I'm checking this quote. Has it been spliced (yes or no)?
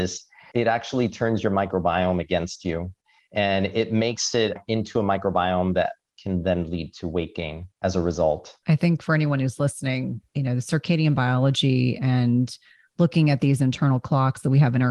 yes